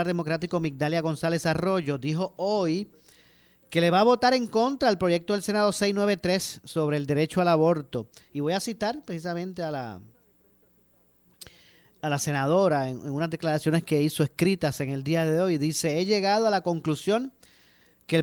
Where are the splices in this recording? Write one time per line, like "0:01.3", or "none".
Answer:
none